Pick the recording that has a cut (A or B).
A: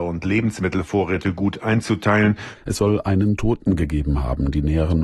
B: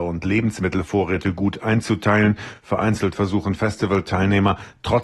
A